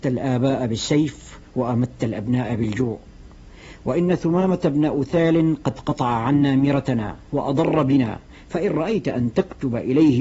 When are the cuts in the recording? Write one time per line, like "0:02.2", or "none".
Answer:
0:07.3